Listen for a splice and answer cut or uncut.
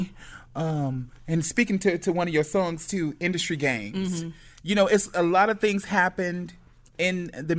uncut